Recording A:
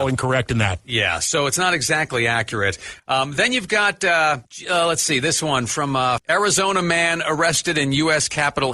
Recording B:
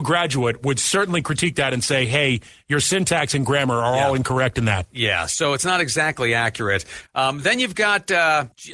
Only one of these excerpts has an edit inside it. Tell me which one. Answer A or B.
A